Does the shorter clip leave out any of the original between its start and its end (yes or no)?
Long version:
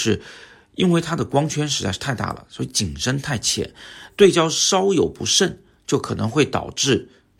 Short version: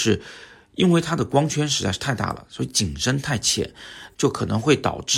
yes